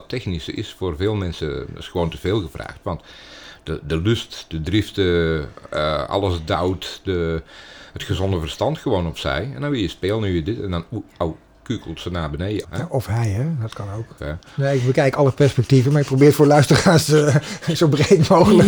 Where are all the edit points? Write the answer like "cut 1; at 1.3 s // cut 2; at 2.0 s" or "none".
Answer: cut 1; at 12.6 s // cut 2; at 14.2 s